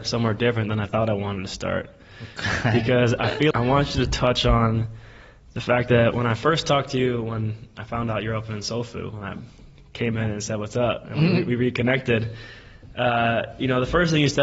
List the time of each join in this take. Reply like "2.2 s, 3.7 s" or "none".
3.5 s